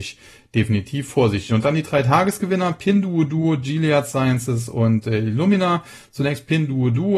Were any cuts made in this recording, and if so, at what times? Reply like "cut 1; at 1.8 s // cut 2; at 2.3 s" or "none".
none

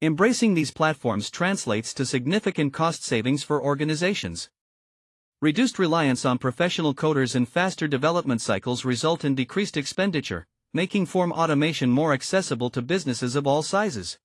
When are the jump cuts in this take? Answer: none

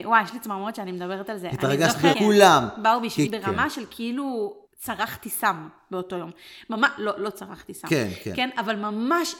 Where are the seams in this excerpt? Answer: cut 1; at 2.1 s // cut 2; at 3.3 s // cut 3; at 4.7 s

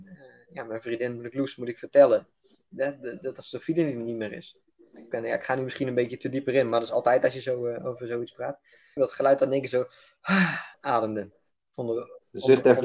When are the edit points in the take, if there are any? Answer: cut 1; at 5.1 s // cut 2; at 9.0 s // cut 3; at 10.7 s

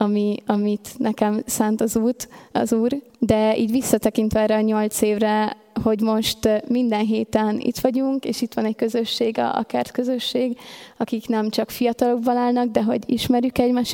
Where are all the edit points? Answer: cut 1; at 3.1 s

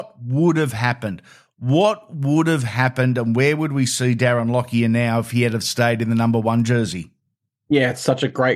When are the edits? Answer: none

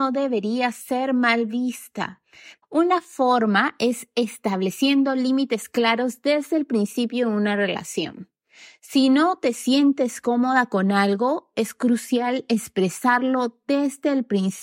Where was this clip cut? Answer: cut 1; at 2.6 s

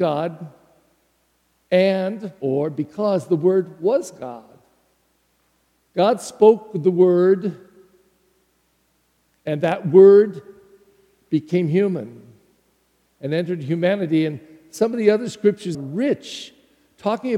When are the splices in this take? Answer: cut 1; at 15.7 s

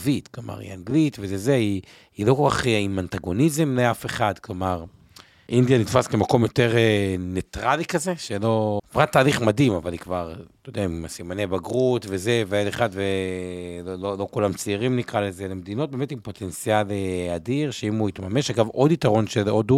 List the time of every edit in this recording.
cut 1; at 5.5 s // cut 2; at 8.8 s

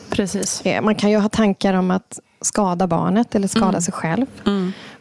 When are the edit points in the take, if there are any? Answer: none

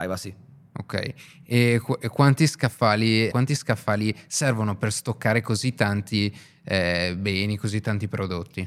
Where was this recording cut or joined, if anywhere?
cut 1; at 3.3 s

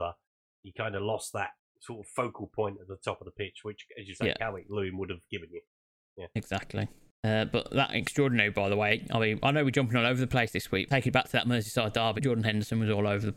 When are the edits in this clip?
cut 1; at 10.9 s // cut 2; at 12.2 s

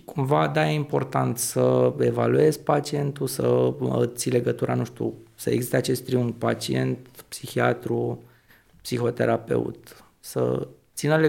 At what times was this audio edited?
none

